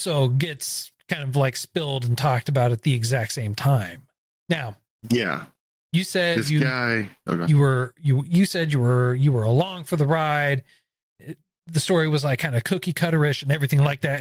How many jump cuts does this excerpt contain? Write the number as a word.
zero